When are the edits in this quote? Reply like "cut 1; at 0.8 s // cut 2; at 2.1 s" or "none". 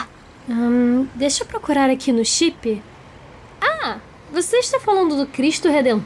none